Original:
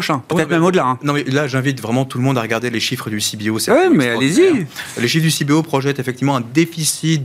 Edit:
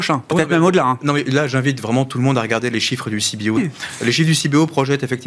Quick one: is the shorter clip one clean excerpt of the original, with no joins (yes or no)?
no